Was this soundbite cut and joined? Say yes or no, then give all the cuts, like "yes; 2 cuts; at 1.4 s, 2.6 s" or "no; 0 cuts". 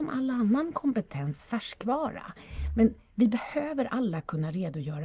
no; 0 cuts